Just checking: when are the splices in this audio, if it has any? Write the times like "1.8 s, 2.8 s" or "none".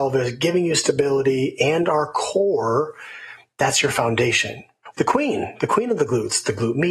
4.9 s